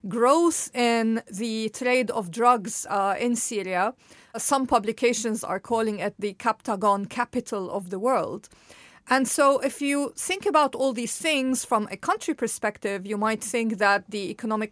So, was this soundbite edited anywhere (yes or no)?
no